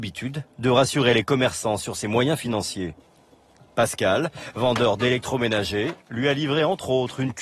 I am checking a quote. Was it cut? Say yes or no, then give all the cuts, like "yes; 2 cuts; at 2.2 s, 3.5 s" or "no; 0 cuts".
no; 0 cuts